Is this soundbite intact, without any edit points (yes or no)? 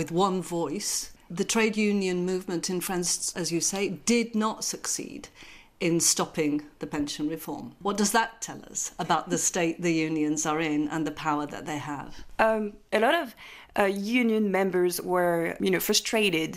no